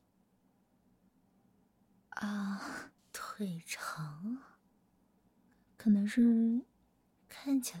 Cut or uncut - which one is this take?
cut